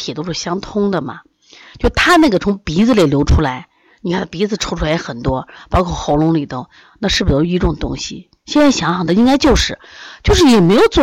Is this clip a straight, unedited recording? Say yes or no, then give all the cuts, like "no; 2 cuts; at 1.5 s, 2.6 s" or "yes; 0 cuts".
yes; 0 cuts